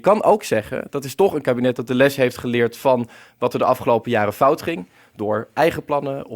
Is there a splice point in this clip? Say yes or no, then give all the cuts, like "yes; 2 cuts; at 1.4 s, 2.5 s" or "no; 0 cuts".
no; 0 cuts